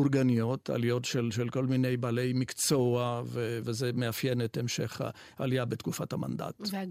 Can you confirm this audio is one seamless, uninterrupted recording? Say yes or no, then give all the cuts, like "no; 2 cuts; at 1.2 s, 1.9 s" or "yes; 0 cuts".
no; 1 cut; at 3.6 s